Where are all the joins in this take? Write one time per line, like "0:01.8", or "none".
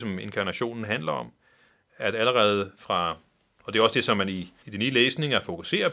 0:04.6